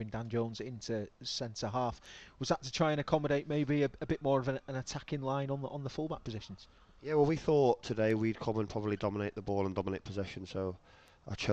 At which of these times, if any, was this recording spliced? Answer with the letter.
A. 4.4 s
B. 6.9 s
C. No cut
C